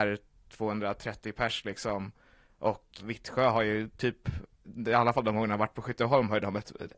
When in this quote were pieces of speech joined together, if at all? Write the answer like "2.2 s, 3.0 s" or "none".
3.0 s, 4.6 s